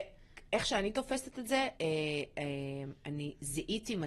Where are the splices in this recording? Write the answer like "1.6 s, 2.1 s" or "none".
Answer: 1.7 s

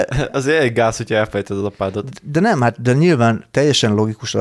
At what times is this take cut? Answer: none

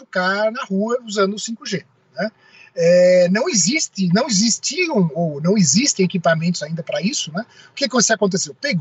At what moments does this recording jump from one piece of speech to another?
none

